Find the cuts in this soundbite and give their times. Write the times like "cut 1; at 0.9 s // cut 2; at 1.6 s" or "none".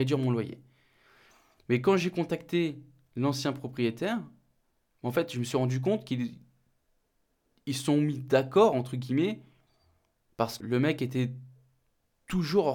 cut 1; at 10.6 s